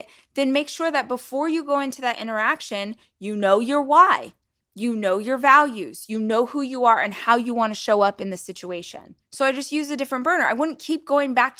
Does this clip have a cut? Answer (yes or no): yes